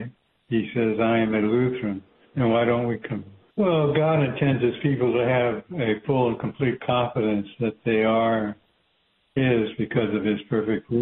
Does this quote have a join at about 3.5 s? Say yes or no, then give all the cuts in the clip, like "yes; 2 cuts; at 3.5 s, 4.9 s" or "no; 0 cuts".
yes; 2 cuts; at 2.2 s, 3.5 s